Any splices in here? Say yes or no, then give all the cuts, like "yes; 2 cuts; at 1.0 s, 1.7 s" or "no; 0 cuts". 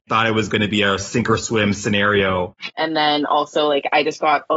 yes; 1 cut; at 2.7 s